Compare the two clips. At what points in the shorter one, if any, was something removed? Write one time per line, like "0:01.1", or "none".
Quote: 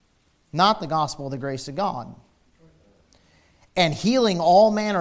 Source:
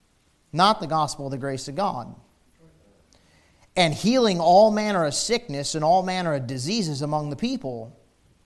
none